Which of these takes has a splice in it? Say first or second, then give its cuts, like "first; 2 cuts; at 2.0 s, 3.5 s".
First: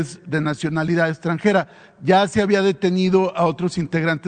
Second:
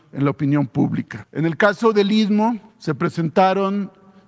second; 2 cuts; at 1.2 s, 2.7 s